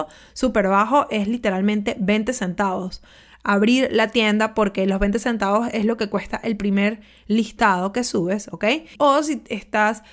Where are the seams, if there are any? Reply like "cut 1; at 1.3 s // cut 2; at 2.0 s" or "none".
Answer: cut 1; at 9.0 s